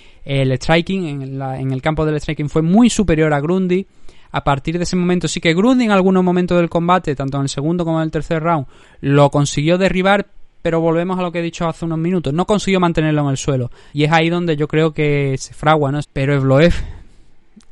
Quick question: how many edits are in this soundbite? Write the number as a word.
two